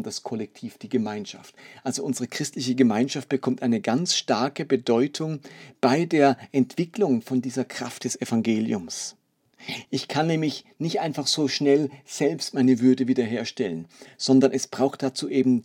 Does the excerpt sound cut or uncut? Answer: uncut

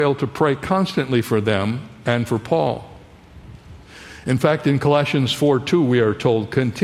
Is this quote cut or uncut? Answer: uncut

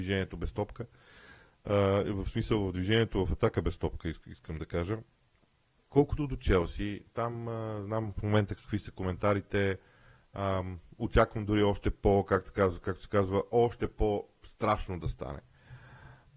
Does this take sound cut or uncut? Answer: cut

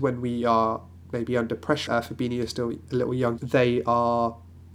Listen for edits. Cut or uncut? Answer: cut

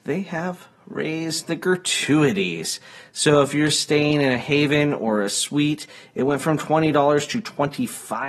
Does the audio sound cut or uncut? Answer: uncut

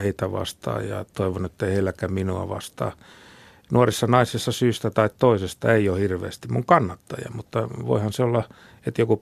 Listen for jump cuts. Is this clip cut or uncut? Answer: uncut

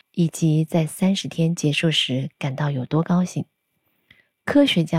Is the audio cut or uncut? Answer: uncut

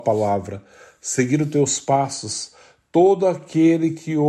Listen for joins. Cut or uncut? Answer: uncut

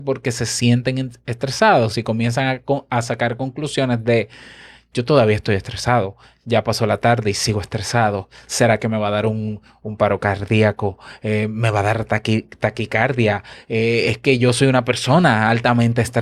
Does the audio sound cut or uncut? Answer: uncut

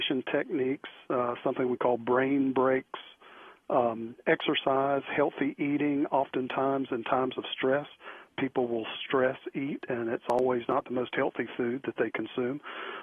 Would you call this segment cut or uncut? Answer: uncut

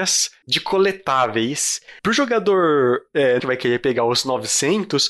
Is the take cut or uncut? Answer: cut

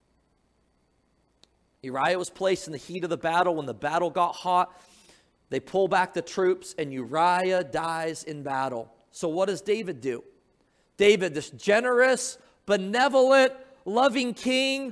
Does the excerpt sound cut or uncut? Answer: uncut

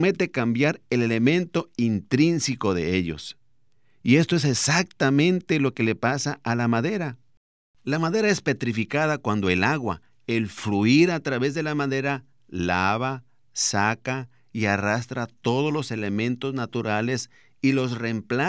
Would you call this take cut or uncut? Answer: uncut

